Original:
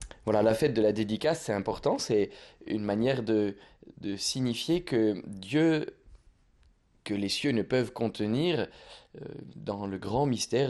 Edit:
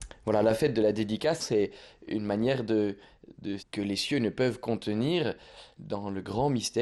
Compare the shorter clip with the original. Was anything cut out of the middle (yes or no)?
yes